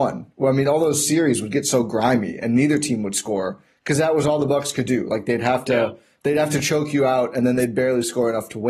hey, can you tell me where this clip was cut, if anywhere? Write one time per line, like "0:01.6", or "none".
none